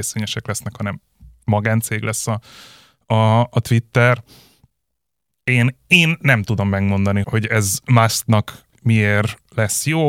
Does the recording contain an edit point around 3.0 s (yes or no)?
no